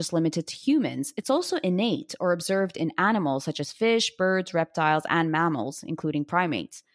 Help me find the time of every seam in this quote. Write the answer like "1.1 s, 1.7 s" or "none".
none